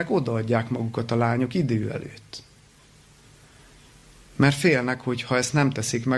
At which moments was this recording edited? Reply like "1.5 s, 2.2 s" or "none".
none